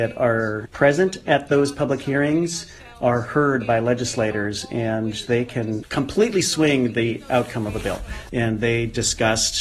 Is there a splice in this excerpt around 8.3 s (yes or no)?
yes